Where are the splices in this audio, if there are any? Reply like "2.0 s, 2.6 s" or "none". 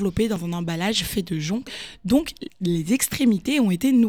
2.5 s